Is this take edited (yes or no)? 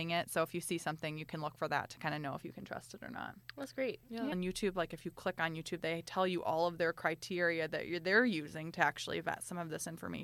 yes